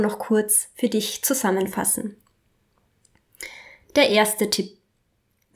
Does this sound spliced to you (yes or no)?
no